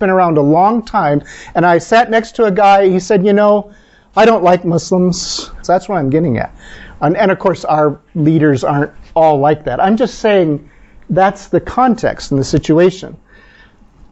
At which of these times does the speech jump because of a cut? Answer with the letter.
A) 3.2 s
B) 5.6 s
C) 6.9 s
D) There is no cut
B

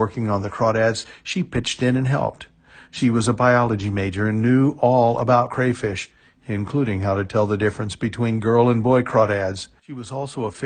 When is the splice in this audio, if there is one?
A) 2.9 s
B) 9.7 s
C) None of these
C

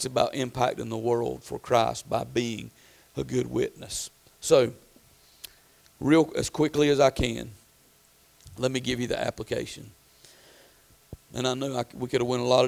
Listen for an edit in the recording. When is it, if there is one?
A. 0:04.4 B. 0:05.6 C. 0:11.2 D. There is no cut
C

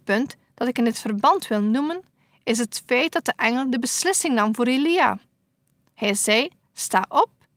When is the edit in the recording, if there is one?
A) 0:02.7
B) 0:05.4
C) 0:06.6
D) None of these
D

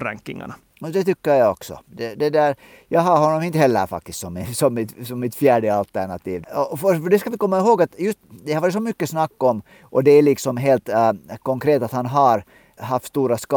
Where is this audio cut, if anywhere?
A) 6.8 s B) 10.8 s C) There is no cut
C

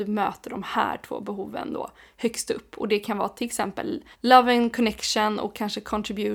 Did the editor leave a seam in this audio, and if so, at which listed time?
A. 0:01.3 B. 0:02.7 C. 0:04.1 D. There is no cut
C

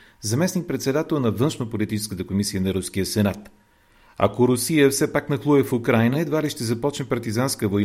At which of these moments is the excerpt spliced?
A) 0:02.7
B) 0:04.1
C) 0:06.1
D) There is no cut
D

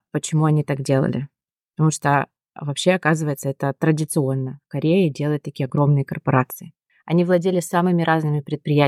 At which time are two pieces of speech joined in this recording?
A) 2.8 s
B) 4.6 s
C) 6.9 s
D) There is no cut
C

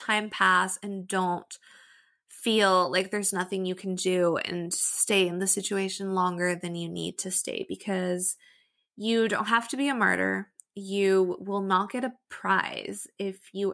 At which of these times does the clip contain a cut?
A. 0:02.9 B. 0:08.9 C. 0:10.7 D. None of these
D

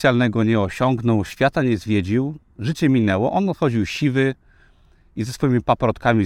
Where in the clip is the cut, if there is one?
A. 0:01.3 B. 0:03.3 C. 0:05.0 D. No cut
D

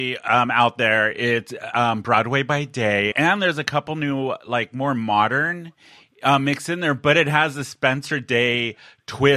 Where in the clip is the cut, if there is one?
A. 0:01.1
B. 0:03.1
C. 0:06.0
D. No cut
B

